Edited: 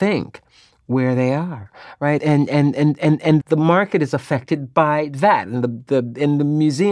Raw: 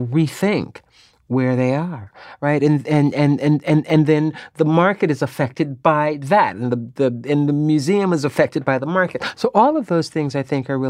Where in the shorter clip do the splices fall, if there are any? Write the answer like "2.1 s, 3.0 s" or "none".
2.2 s, 3.4 s